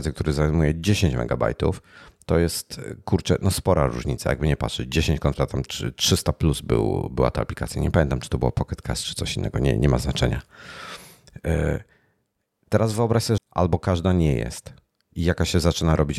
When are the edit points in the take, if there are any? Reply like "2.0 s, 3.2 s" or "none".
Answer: 13.4 s